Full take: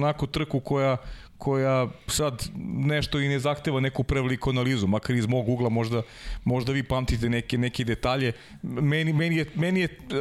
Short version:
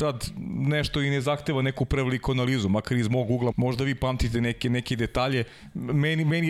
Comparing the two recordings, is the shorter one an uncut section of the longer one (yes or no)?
no